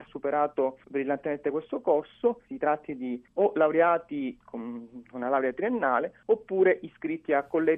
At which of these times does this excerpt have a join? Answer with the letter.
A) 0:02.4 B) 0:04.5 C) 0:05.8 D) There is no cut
A